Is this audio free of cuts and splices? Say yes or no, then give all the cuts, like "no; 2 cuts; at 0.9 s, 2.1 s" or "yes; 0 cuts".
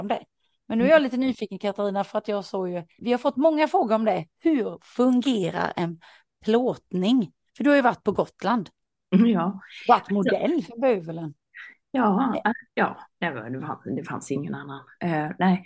no; 1 cut; at 3.0 s